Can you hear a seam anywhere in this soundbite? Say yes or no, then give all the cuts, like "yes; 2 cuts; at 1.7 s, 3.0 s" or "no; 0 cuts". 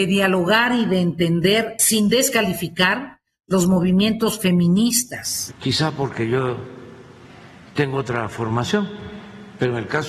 yes; 1 cut; at 5.5 s